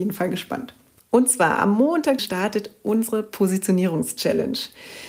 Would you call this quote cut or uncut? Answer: cut